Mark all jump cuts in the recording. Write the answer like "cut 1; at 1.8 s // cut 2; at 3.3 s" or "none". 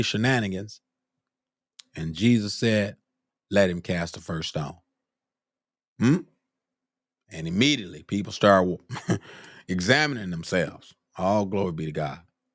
cut 1; at 3.3 s